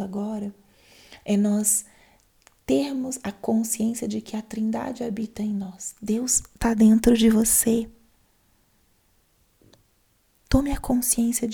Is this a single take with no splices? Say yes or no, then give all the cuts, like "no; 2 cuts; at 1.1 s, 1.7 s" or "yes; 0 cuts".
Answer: yes; 0 cuts